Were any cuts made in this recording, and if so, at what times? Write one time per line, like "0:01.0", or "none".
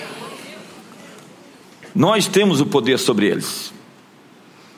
0:01.9